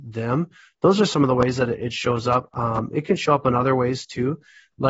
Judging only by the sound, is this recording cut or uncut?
uncut